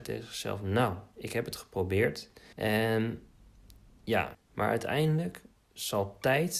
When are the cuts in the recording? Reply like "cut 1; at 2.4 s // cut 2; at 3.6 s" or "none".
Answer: cut 1; at 2.5 s // cut 2; at 4.3 s

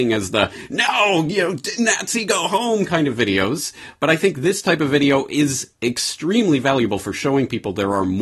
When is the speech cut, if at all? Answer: none

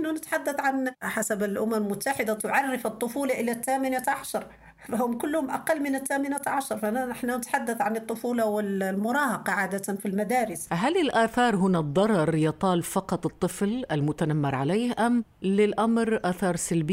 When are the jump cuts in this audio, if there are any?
none

